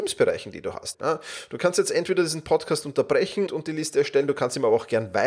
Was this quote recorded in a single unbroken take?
no; 2 cuts; at 0.9 s, 3.5 s

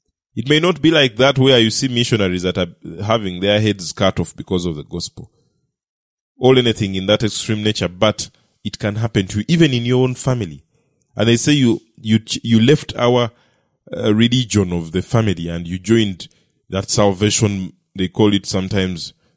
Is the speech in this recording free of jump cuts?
yes; 0 cuts

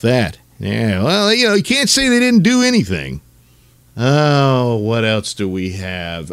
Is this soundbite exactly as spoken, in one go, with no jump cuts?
no; 1 cut; at 3.8 s

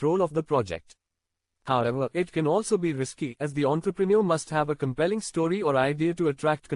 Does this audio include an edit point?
no; 0 cuts

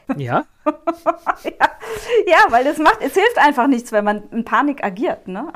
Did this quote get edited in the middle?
no; 0 cuts

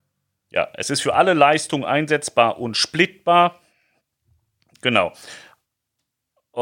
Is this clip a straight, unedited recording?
yes; 0 cuts

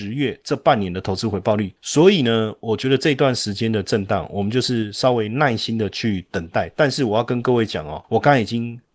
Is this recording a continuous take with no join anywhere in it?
no; 1 cut; at 1.8 s

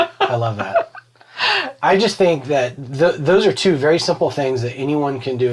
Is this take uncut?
yes; 0 cuts

